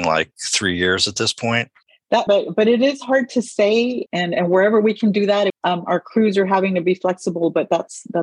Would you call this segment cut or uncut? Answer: cut